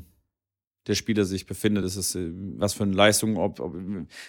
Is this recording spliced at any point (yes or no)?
no